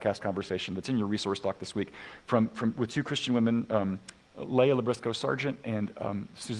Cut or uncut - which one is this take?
uncut